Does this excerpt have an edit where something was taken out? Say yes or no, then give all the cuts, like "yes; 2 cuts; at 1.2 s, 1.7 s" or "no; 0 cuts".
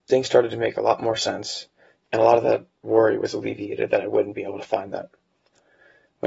yes; 1 cut; at 2.0 s